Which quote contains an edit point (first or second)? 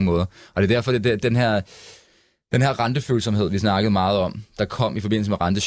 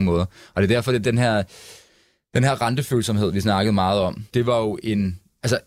second